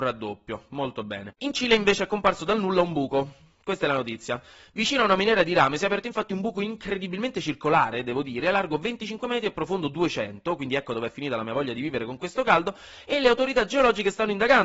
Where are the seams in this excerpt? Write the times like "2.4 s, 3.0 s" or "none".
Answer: none